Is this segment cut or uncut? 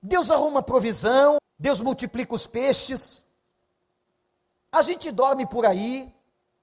cut